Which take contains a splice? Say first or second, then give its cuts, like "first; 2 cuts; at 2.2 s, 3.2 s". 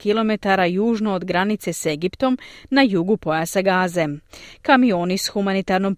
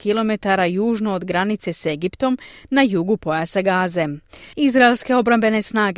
second; 1 cut; at 4.5 s